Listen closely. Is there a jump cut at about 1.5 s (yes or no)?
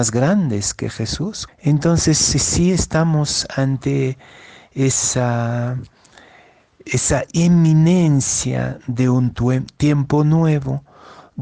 yes